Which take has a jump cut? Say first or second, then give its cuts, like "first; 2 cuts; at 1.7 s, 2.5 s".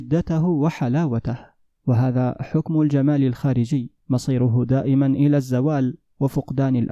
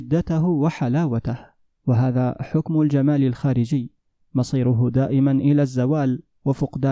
first; 1 cut; at 4.0 s